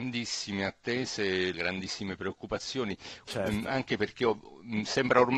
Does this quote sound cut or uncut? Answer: cut